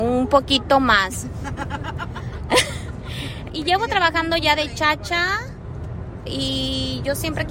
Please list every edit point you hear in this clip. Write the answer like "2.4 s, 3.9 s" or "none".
3.5 s, 6.3 s